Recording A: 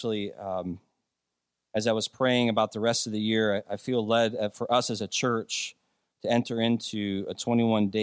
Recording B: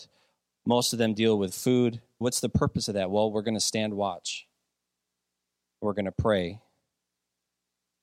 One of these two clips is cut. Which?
B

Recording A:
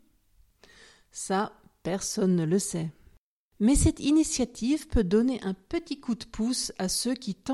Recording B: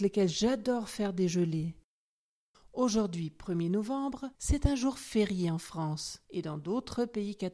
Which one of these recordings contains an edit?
B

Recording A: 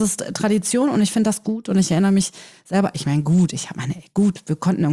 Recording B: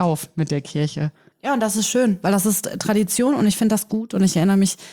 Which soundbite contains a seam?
B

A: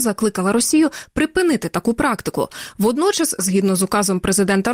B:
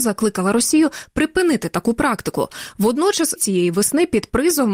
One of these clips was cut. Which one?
B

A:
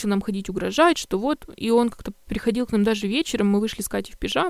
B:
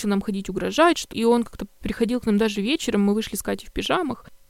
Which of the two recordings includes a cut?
B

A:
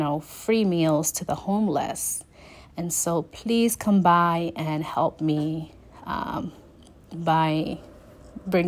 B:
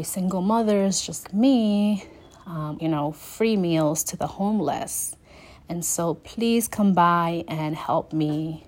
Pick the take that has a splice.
B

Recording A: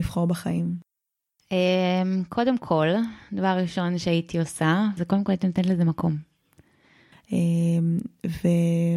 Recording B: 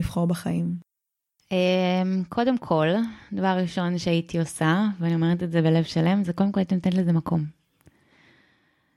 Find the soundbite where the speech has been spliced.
A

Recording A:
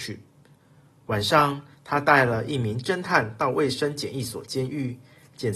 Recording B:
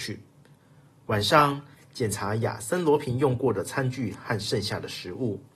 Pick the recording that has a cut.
B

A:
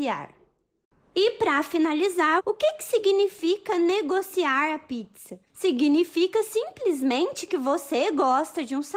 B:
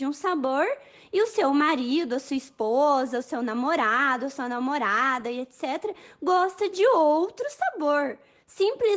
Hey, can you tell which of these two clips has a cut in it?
A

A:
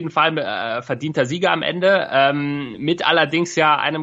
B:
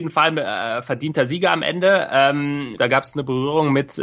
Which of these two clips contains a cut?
B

